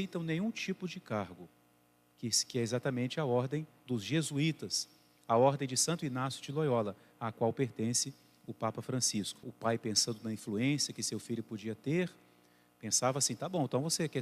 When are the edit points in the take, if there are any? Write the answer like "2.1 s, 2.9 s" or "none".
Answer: 9.4 s